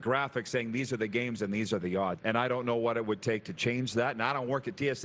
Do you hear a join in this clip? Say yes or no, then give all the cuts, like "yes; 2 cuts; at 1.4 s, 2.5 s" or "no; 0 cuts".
yes; 1 cut; at 2.2 s